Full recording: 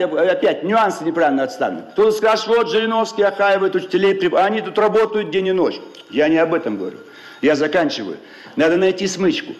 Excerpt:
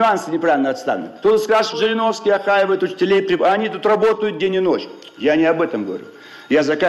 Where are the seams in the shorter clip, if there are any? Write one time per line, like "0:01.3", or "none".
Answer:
0:01.7